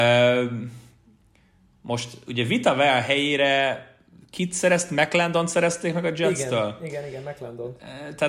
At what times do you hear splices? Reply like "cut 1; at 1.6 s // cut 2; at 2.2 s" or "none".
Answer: none